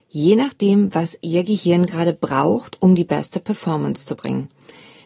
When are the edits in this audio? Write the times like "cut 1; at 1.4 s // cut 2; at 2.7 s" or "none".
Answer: none

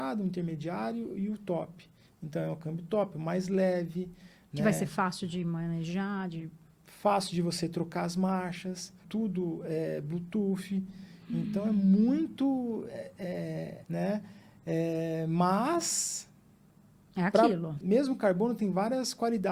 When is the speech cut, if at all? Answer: cut 1; at 9.0 s // cut 2; at 13.8 s // cut 3; at 17.8 s

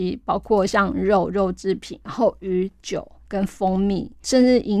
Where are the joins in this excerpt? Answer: cut 1; at 2.8 s

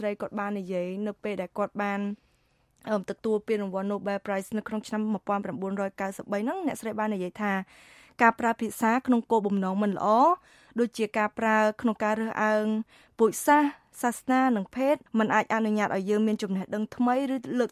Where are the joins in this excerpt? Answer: cut 1; at 15.1 s

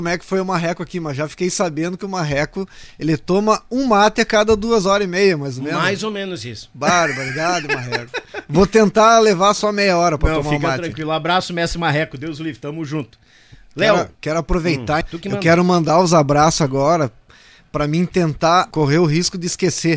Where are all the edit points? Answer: cut 1; at 15.0 s // cut 2; at 18.7 s

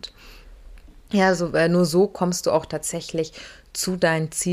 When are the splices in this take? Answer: none

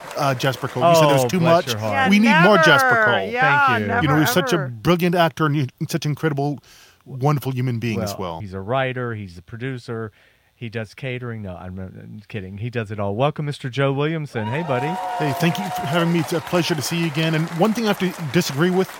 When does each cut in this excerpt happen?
cut 1; at 8.4 s

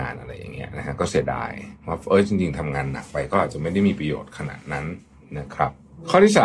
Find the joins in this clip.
none

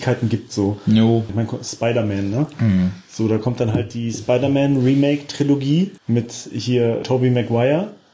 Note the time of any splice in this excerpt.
cut 1; at 1.3 s // cut 2; at 6.0 s // cut 3; at 7.0 s

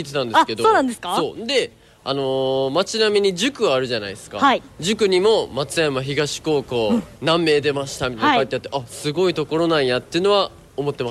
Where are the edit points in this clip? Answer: cut 1; at 7.1 s

